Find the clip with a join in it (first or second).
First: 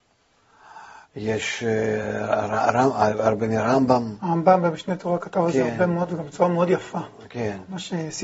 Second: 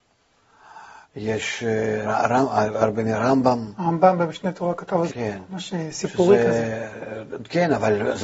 second